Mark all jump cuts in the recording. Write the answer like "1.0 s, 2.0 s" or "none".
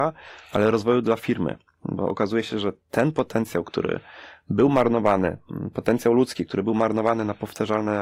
none

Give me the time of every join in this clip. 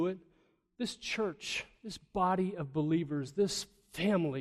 none

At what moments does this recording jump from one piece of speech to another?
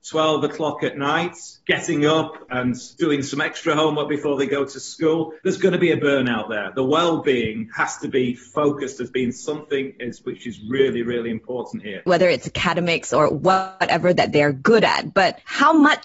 12.1 s

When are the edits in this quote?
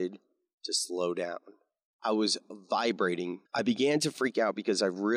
1.9 s, 3.5 s

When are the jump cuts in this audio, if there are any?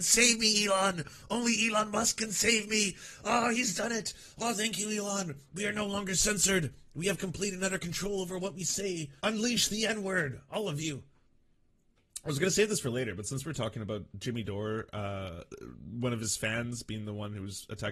9.2 s

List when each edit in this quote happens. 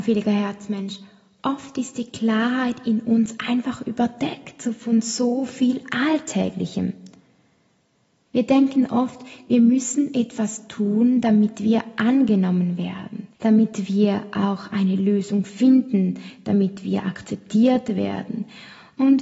8.3 s, 13.3 s

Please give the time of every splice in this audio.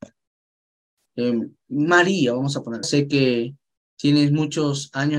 1.1 s, 2.8 s

